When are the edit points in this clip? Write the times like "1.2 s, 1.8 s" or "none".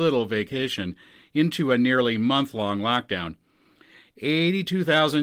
4.0 s